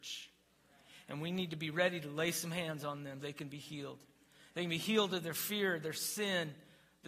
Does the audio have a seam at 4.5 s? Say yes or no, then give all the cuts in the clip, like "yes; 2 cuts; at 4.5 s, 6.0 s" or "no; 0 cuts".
no; 1 cut; at 3.2 s